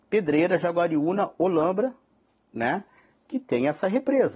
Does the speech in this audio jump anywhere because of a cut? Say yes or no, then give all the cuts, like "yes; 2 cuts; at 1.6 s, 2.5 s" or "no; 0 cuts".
no; 0 cuts